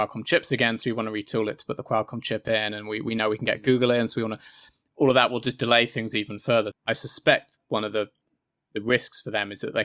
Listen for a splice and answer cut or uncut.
cut